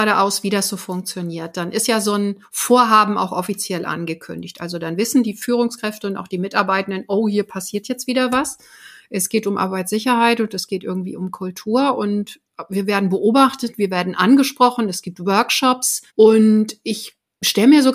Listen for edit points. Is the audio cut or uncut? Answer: cut